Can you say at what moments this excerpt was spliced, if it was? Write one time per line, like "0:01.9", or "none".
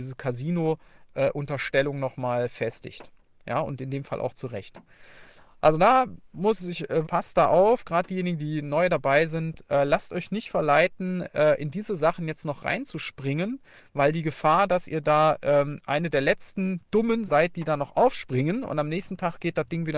0:07.0
0:17.3

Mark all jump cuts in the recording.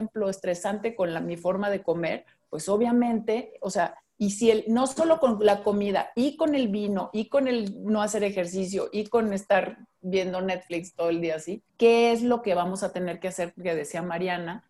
0:11.7

